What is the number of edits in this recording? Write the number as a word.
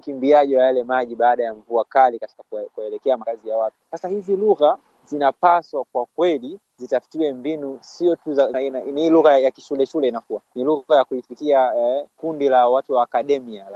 one